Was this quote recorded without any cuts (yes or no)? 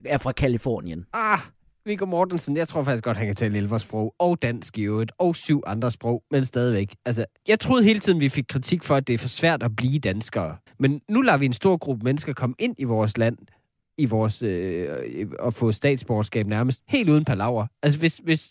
no